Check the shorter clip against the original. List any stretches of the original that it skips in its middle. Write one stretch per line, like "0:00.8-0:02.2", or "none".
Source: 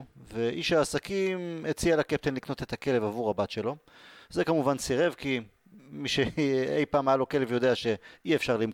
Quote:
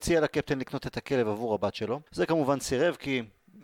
0:03.8-0:04.2